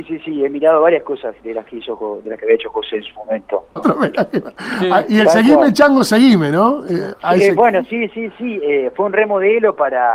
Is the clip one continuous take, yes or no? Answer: no